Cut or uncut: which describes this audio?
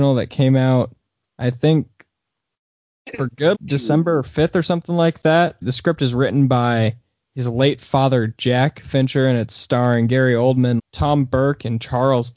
cut